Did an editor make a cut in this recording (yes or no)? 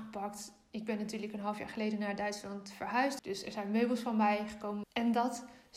yes